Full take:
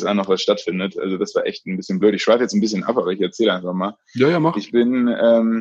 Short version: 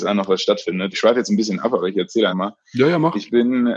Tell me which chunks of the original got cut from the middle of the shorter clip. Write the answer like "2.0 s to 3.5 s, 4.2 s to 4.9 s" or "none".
0.9 s to 2.2 s, 3.5 s to 3.7 s